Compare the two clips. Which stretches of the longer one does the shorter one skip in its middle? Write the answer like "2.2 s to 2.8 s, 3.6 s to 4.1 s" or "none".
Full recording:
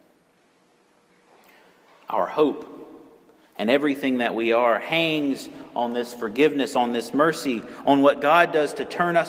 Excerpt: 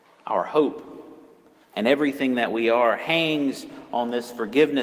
none